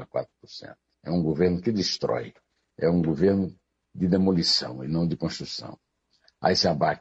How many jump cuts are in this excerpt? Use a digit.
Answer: 1